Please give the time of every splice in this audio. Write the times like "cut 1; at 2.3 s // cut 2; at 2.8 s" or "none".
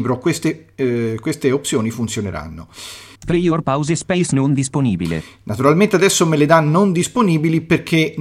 cut 1; at 3.1 s